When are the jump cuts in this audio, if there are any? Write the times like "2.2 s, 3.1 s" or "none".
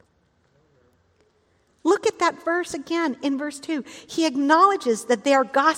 1.7 s